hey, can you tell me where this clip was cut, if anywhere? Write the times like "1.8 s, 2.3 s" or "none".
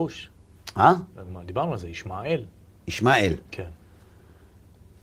none